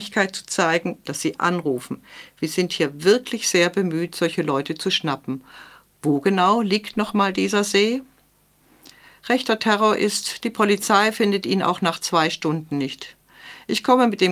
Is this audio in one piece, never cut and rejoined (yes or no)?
no